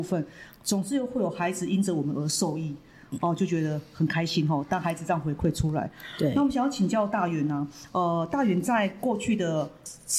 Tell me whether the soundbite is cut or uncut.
uncut